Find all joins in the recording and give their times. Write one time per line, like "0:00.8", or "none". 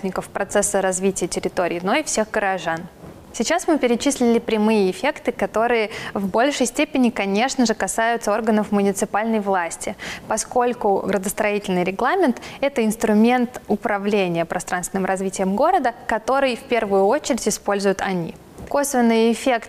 0:03.3